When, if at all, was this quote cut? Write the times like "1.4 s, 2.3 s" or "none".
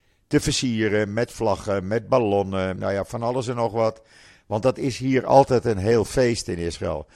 2.8 s